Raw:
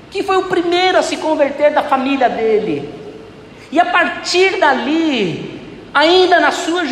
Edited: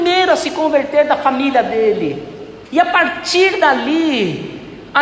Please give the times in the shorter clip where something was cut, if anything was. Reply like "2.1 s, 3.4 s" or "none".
2.6 s